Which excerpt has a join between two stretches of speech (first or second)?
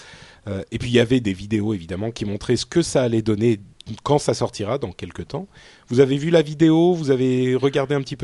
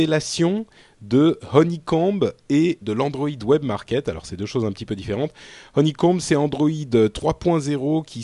second